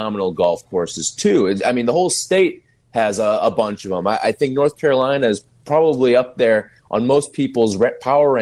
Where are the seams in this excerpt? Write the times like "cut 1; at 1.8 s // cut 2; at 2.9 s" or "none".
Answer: none